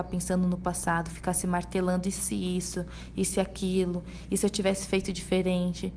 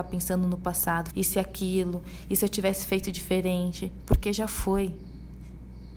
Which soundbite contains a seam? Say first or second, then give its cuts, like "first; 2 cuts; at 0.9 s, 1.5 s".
second; 1 cut; at 1.1 s